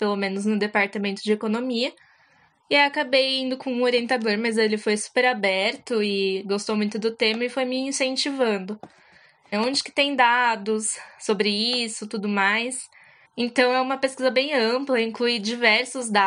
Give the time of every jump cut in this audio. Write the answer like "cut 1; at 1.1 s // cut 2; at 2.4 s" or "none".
cut 1; at 9.5 s // cut 2; at 13.2 s